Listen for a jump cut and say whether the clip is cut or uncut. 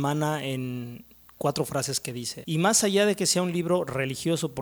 cut